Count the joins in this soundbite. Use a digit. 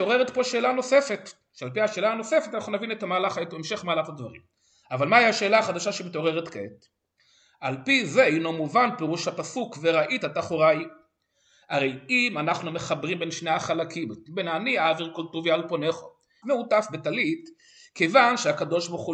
1